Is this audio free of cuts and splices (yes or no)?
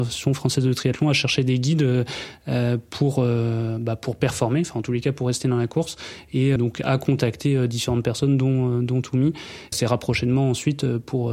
no